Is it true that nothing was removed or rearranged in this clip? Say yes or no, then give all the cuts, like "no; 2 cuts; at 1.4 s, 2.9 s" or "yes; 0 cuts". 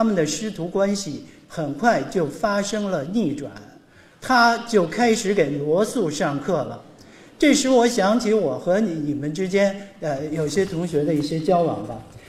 yes; 0 cuts